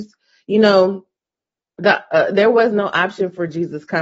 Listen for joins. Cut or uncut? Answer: uncut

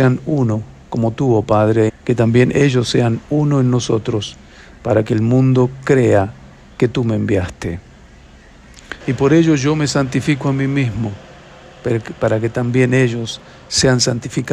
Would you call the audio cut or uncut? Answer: cut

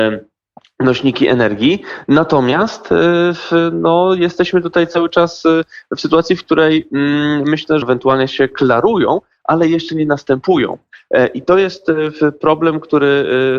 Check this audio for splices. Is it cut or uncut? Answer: cut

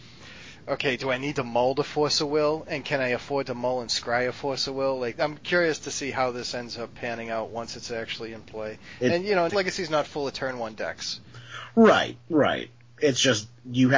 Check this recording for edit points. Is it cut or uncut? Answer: cut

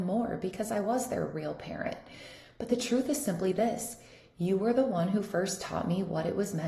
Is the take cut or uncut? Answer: uncut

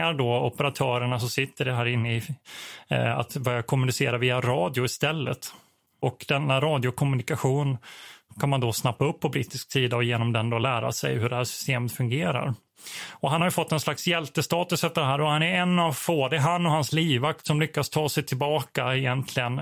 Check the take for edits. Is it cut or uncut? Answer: uncut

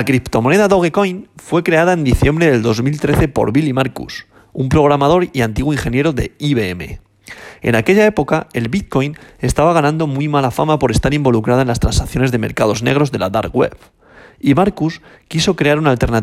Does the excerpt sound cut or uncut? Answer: uncut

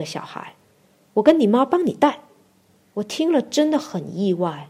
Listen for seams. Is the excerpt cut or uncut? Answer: cut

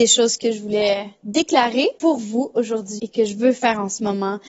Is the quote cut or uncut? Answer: cut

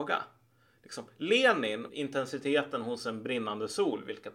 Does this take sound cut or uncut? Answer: cut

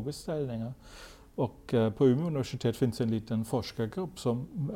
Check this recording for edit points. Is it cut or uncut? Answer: uncut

